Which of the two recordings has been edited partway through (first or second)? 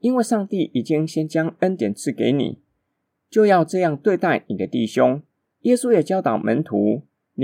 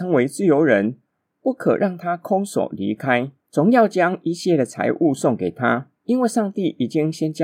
second